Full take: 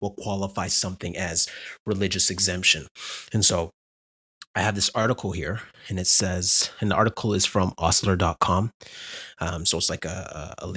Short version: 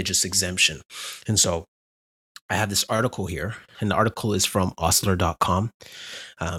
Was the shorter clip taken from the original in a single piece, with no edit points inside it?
no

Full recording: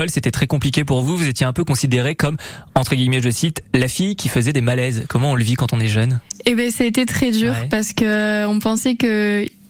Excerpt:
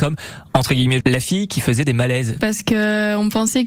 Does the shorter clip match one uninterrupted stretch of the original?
no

